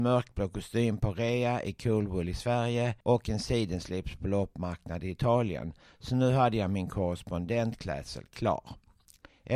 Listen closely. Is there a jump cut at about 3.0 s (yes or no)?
yes